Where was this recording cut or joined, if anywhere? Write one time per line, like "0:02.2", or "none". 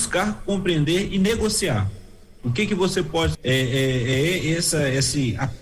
0:03.3